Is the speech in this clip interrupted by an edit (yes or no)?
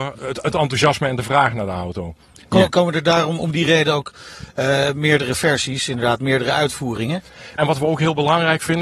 yes